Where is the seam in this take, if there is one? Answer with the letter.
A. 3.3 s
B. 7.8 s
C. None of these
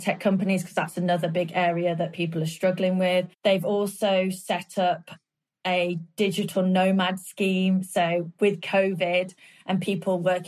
A